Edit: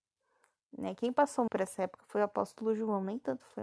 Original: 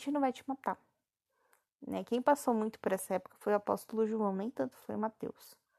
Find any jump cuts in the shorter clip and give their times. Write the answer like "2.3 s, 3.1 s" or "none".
1.5 s